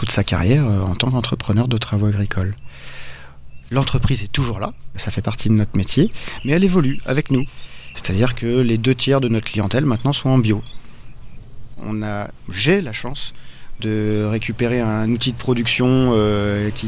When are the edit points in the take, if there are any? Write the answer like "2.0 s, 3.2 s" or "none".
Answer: none